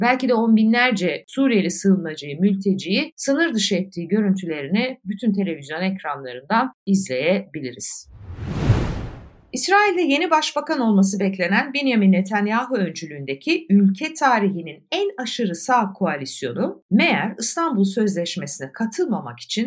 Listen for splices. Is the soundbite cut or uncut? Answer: uncut